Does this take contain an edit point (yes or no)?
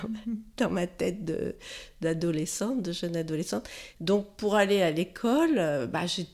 yes